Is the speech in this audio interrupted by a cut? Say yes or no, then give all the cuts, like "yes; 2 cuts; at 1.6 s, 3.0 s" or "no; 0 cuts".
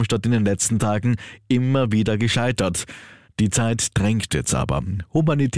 no; 0 cuts